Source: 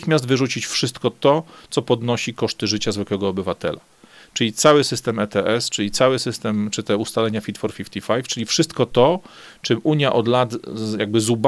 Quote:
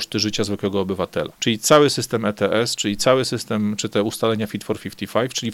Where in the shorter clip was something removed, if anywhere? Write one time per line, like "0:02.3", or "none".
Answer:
0:01.3